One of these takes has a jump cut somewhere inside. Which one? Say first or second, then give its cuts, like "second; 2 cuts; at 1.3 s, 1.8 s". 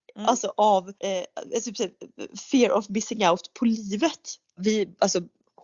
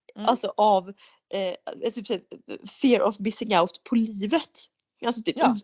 first; 2 cuts; at 1.0 s, 4.6 s